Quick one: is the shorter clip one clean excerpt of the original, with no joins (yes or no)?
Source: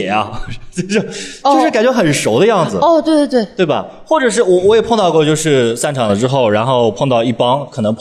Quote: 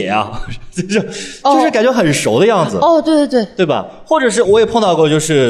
no